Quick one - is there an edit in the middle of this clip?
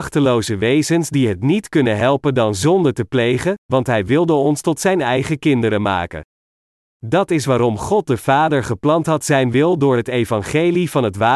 yes; 1 cut; at 3.6 s

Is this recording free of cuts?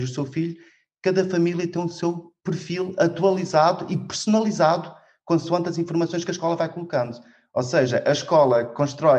no; 1 cut; at 2.4 s

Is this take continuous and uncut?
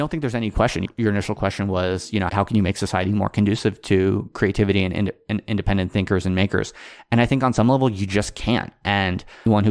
no; 1 cut; at 2.3 s

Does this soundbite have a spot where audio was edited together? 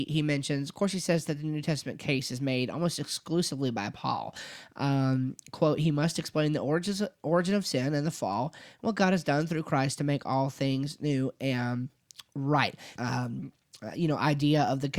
yes; 1 cut; at 12.9 s

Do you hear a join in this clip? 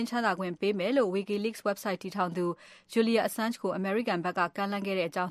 no; 0 cuts

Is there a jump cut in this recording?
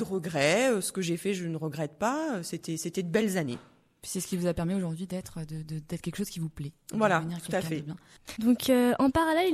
no; 0 cuts

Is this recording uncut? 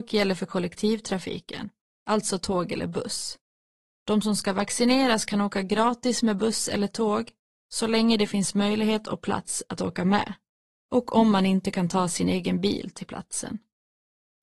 yes; 0 cuts

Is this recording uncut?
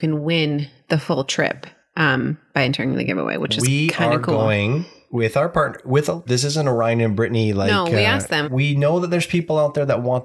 no; 2 cuts; at 6.3 s, 8.4 s

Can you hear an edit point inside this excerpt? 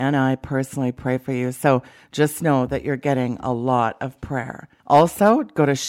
no; 0 cuts

